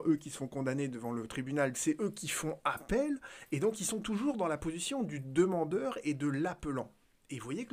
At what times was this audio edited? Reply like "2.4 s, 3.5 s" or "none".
1.7 s